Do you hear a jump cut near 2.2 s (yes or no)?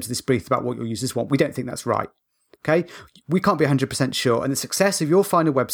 no